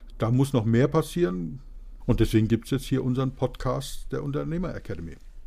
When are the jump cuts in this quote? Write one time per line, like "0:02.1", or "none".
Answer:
0:02.0